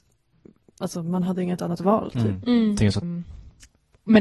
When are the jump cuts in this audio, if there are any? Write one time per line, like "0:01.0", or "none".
0:03.0